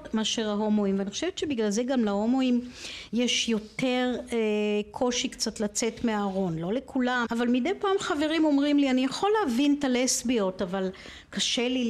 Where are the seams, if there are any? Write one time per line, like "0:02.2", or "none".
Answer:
0:07.2

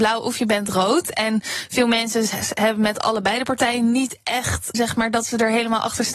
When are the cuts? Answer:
0:04.7

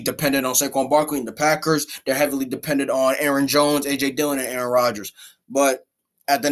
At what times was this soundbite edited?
none

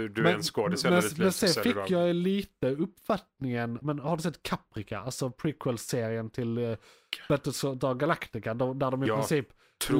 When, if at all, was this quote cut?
0:03.8

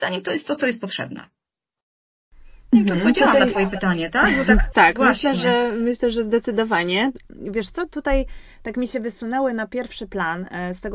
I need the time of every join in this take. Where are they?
0:04.7

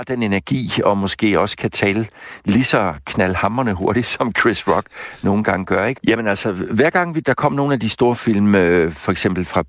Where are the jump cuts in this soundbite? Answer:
0:06.0

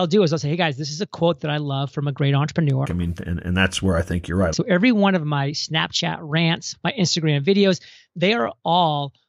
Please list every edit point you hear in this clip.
0:02.8
0:04.5
0:06.7

